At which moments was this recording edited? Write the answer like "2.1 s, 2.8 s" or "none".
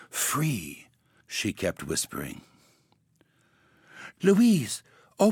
1.2 s, 4.2 s